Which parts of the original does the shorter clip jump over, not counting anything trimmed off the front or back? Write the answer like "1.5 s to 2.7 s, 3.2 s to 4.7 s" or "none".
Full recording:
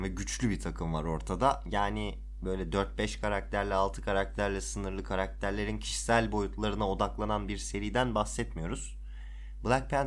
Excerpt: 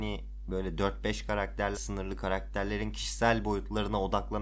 3.7 s to 4.6 s